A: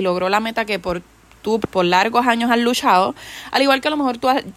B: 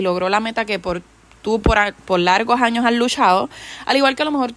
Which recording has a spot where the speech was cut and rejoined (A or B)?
A